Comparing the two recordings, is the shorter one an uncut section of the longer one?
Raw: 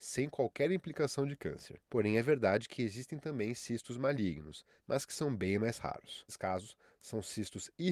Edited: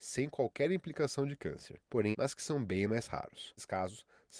no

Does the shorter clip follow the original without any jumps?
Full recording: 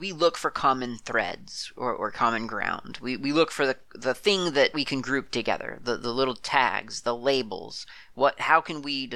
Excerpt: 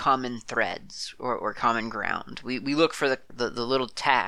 no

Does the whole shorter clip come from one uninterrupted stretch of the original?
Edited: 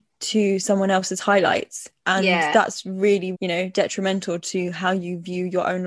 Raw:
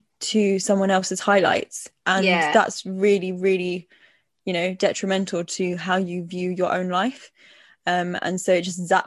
no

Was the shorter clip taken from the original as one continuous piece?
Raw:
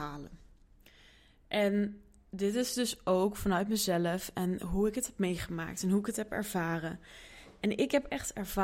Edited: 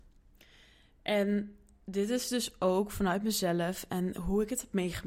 yes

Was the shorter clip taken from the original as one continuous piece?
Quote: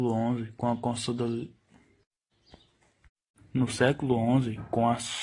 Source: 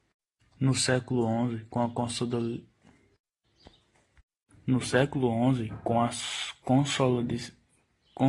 yes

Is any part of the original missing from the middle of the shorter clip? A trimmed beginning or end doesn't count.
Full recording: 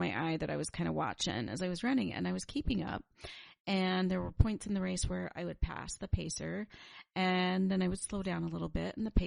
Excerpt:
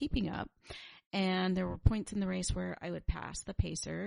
no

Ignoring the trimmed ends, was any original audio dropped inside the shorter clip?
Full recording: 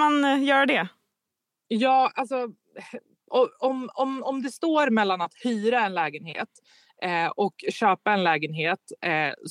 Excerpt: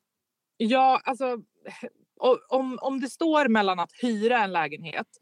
yes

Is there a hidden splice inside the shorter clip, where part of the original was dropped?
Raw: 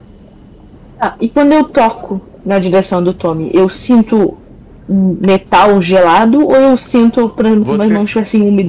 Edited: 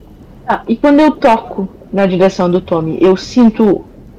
no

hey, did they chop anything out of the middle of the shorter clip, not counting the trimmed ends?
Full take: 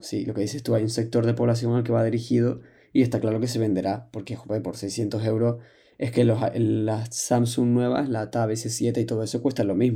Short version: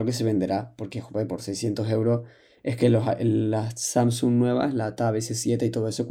no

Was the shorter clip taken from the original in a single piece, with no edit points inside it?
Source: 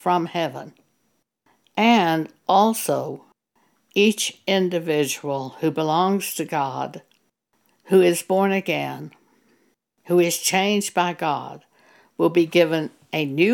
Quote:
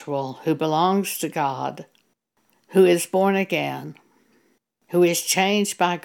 yes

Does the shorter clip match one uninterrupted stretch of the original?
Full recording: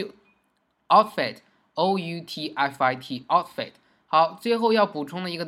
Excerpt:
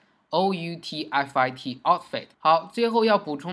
no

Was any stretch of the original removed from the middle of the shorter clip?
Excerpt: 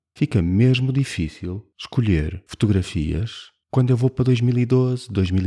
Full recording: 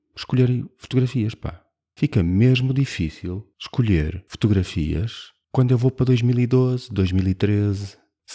no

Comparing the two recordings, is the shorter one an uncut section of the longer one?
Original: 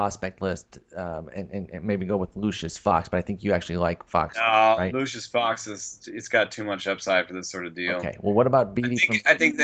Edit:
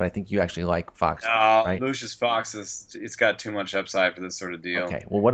yes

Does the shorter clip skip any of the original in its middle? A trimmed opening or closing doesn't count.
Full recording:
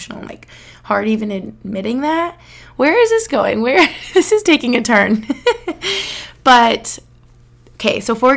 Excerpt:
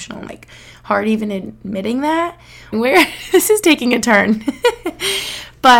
yes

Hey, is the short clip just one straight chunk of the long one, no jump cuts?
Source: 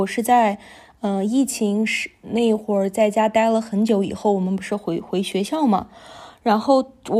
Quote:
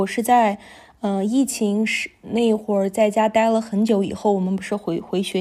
yes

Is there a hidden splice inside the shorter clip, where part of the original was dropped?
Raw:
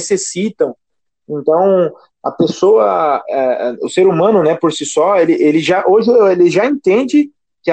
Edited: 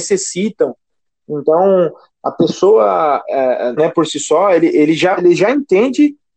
yes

